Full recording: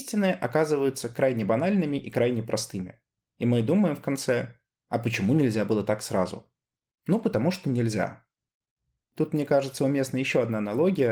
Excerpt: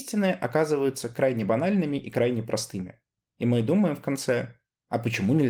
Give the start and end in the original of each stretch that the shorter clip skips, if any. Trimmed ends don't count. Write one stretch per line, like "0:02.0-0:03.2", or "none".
none